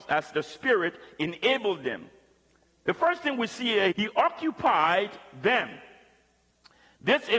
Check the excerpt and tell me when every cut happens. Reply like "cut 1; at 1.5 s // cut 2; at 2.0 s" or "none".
cut 1; at 3.9 s